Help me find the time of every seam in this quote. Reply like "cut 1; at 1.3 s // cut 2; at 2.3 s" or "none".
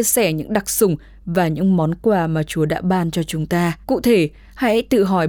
cut 1; at 3.8 s